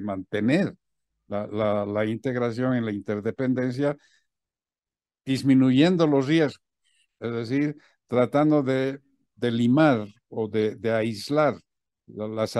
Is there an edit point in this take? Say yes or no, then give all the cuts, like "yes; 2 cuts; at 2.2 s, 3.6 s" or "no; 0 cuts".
no; 0 cuts